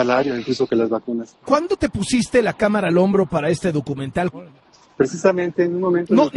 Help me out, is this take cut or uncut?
cut